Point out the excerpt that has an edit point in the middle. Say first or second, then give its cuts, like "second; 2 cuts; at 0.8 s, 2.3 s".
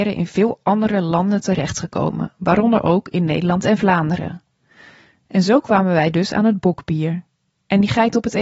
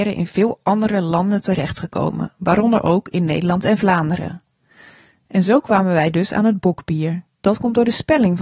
second; 1 cut; at 7.4 s